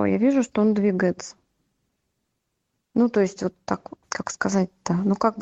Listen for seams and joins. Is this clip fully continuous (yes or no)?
no